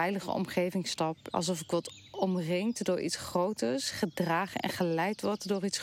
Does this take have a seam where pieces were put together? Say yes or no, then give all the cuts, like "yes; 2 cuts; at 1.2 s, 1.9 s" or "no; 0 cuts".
yes; 1 cut; at 1.3 s